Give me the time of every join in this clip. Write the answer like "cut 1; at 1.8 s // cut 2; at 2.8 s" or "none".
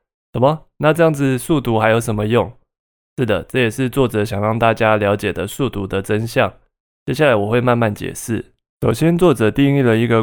none